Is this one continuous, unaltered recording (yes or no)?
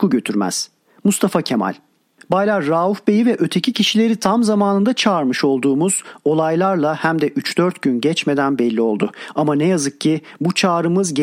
yes